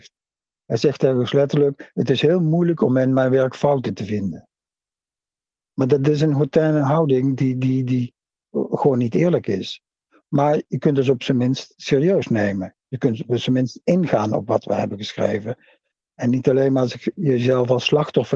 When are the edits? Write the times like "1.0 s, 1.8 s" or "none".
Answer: 5.6 s